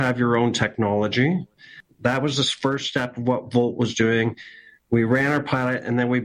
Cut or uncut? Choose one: uncut